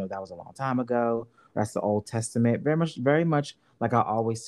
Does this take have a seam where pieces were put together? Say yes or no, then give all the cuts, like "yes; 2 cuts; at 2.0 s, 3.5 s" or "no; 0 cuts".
no; 0 cuts